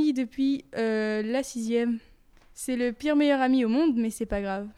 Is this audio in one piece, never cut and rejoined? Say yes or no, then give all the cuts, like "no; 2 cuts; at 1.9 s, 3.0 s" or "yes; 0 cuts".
yes; 0 cuts